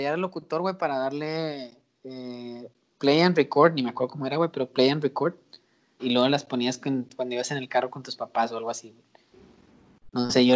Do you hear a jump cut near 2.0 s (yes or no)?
no